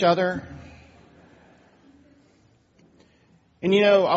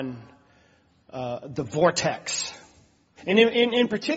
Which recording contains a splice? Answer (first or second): second